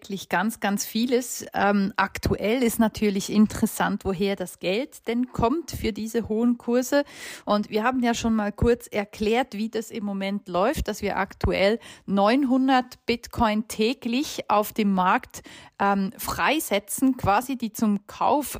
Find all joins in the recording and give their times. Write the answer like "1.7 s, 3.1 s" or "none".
7.4 s